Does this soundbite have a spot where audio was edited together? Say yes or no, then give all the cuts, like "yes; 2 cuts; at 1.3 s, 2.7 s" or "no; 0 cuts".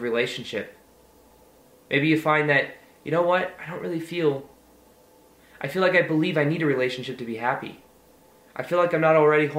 no; 0 cuts